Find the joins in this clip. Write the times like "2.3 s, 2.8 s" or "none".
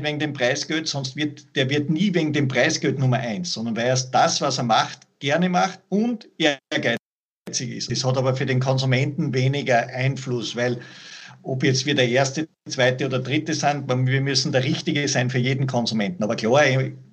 7.9 s